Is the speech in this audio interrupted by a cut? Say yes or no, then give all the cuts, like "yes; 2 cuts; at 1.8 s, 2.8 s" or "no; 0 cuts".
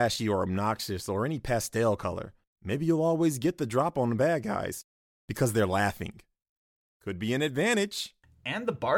no; 0 cuts